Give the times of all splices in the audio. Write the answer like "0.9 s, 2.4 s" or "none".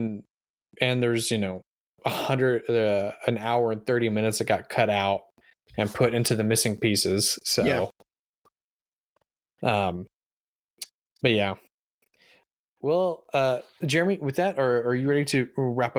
none